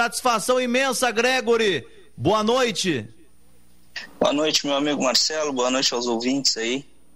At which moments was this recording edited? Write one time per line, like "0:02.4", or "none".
none